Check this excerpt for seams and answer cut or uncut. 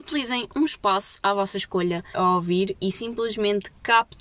cut